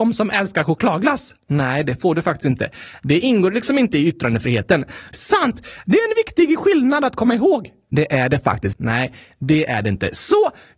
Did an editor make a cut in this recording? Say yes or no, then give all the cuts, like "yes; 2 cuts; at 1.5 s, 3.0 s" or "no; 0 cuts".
yes; 2 cuts; at 5.1 s, 8.7 s